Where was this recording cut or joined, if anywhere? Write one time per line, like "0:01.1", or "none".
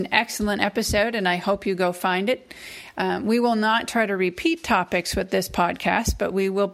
none

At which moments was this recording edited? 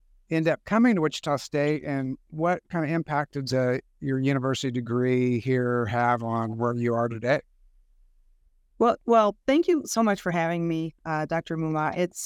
none

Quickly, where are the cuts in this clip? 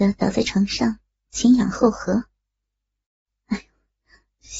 0:03.3

